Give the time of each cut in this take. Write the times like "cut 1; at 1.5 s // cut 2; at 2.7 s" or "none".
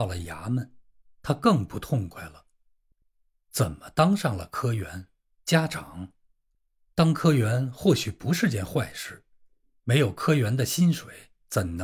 cut 1; at 5.4 s